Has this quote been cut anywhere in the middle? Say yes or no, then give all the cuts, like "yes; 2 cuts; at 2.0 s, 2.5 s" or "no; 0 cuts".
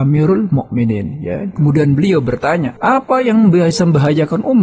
yes; 2 cuts; at 1.6 s, 2.8 s